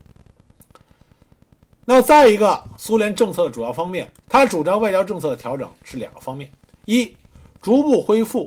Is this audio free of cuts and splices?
no; 1 cut; at 4.2 s

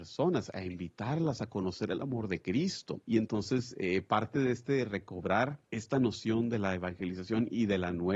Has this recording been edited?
yes; 2 cuts; at 3.0 s, 5.6 s

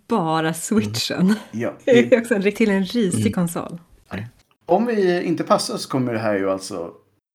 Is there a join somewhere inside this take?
yes; 2 cuts; at 2.5 s, 4.1 s

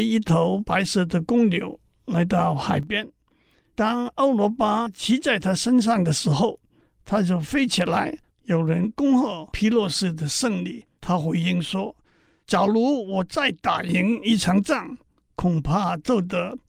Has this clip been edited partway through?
yes; 2 cuts; at 8.3 s, 10.9 s

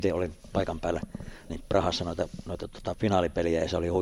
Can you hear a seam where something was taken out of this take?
yes; 2 cuts; at 1.5 s, 2.9 s

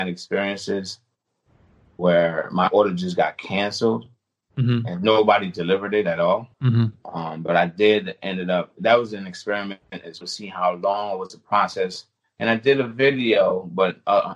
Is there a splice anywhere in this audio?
yes; 2 cuts; at 6.5 s, 10.2 s

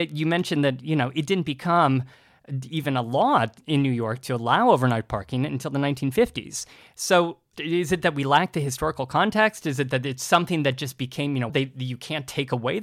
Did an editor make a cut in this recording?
yes; 1 cut; at 11.5 s

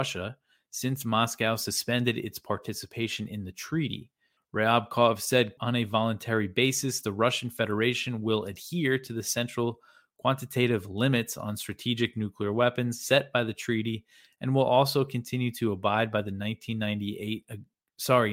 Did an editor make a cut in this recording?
yes; 2 cuts; at 4.4 s, 5.6 s

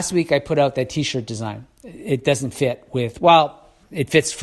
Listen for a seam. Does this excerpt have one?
no; 0 cuts

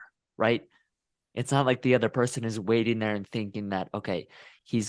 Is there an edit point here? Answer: no; 0 cuts

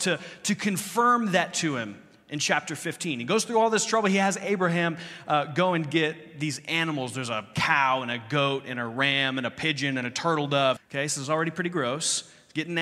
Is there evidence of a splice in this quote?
yes; 1 cut; at 10.8 s

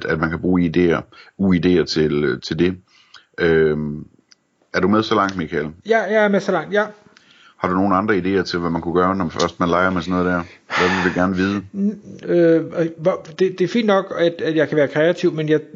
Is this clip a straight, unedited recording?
no; 1 cut; at 12.2 s

